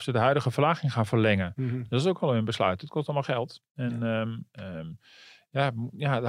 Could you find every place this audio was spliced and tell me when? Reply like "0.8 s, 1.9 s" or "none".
none